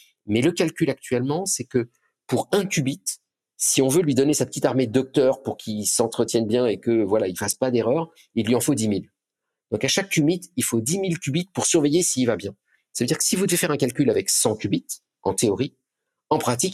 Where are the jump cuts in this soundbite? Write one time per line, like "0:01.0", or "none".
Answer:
none